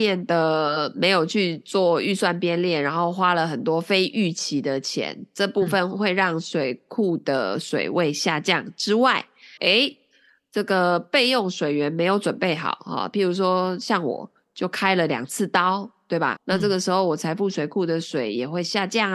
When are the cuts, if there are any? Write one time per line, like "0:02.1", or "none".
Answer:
0:09.6
0:13.1
0:16.4